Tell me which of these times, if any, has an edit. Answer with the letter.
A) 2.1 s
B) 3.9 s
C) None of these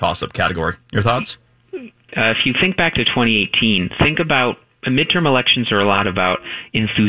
A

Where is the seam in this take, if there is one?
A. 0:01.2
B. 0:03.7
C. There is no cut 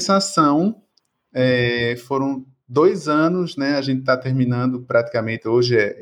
C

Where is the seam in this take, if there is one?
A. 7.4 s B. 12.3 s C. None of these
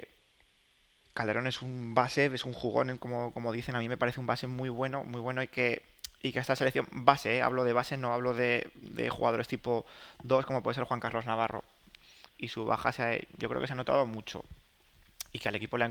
B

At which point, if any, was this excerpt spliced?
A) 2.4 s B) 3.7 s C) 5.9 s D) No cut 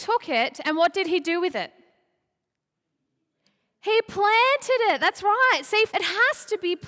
C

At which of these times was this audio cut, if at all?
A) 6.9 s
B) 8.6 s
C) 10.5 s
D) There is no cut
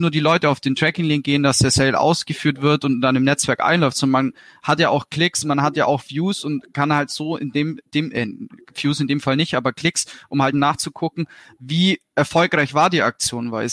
C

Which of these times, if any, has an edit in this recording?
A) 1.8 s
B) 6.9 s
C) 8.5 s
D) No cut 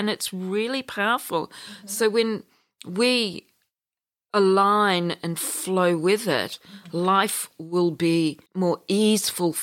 C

